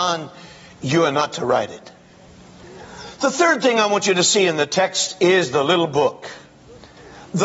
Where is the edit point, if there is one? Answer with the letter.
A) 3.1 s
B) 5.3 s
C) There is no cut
C